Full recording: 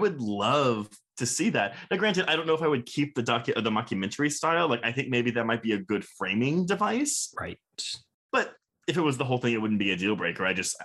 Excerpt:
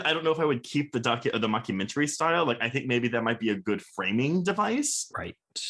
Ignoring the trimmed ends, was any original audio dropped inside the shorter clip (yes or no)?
no